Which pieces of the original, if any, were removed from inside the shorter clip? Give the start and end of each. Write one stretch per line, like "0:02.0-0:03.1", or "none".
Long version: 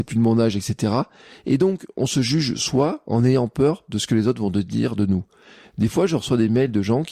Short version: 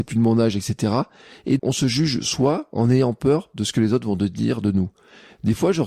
0:01.6-0:01.9